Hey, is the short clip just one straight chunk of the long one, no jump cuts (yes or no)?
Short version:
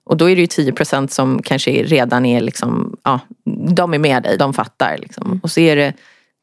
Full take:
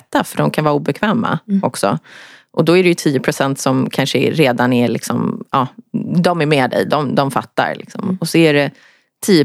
no